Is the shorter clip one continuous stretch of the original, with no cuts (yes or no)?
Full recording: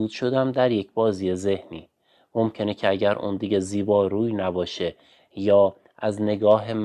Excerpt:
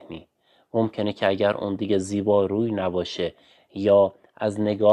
yes